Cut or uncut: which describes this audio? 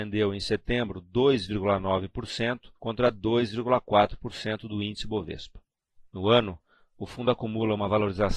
cut